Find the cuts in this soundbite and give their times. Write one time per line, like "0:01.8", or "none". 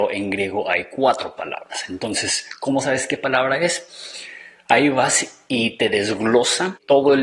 none